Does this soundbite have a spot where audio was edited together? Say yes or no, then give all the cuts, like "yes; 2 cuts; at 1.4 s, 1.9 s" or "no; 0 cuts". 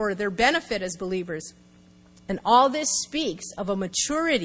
yes; 1 cut; at 2.2 s